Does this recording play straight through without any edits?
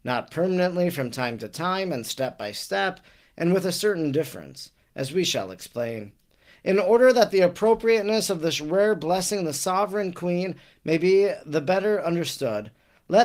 yes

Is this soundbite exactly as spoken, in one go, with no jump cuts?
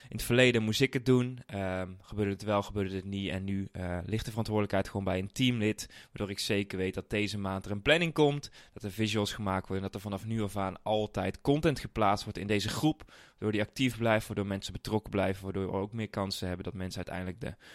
yes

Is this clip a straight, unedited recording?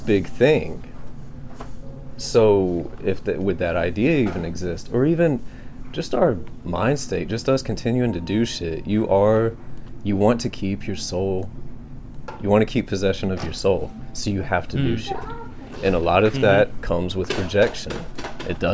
yes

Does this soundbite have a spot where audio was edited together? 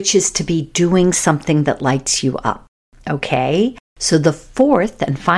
yes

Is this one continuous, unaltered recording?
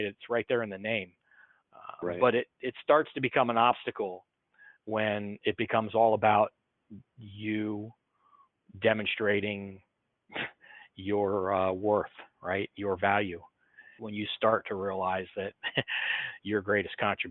no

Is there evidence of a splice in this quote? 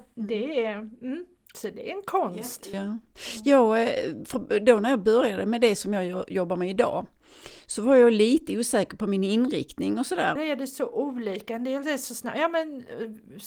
yes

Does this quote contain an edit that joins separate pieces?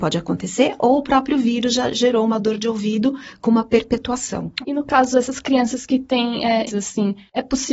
yes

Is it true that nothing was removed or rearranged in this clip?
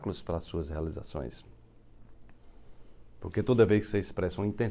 yes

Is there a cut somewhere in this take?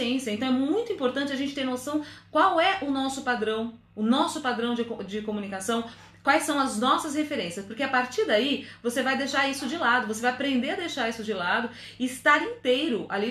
no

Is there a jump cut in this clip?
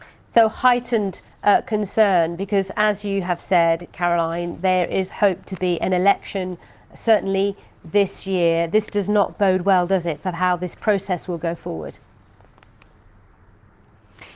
no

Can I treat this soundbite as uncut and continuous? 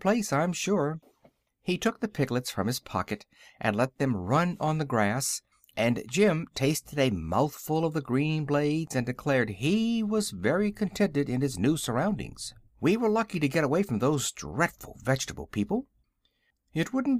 no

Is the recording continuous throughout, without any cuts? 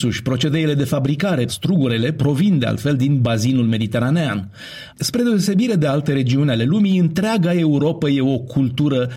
no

